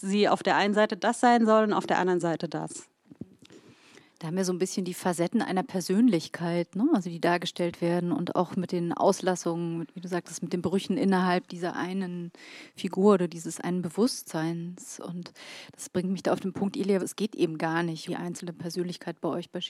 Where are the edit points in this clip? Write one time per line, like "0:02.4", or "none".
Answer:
0:17.0
0:18.1

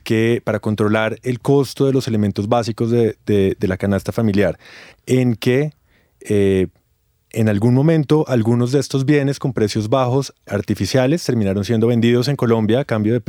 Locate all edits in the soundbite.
0:04.9
0:10.5

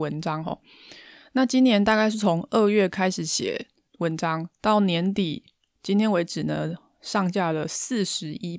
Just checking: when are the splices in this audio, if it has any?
none

